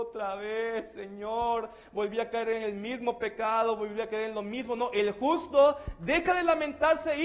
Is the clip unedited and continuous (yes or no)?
yes